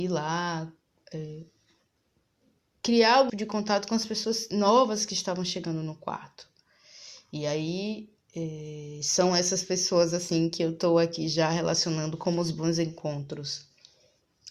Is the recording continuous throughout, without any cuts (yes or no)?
no